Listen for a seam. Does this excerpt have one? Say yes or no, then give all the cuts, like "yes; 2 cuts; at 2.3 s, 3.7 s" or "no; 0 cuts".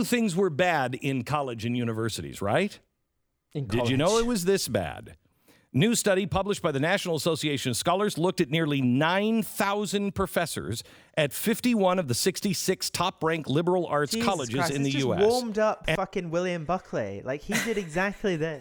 no; 0 cuts